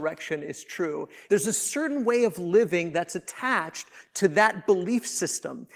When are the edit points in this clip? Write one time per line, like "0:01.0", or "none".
0:01.3